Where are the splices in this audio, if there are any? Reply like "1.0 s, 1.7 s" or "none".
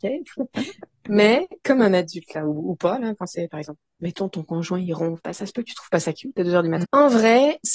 6.8 s